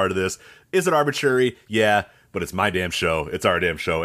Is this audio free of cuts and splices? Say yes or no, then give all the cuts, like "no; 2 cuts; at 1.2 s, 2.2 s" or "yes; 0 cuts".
yes; 0 cuts